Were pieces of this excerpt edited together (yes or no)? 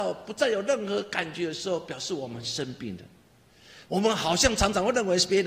yes